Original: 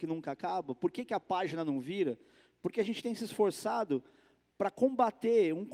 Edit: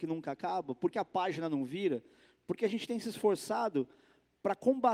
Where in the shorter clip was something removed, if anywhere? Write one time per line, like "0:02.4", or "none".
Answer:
0:00.9